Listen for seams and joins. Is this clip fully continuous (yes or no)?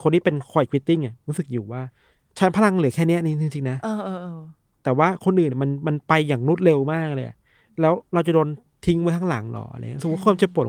yes